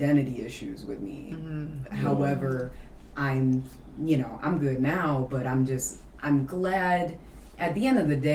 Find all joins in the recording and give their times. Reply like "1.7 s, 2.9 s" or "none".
none